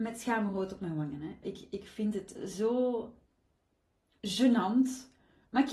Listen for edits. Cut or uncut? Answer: cut